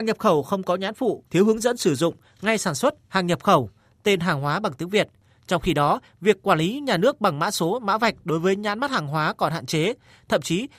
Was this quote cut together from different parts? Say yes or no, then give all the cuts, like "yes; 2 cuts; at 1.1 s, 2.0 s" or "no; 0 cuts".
yes; 2 cuts; at 1.3 s, 6.1 s